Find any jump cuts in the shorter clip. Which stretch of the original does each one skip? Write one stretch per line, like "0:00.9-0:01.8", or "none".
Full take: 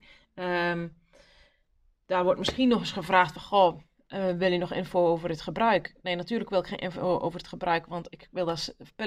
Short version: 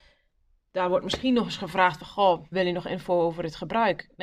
0:03.9-0:04.4